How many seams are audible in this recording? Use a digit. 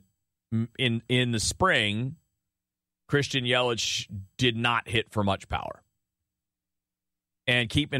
0